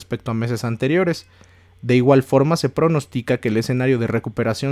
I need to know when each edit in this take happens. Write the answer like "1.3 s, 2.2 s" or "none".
none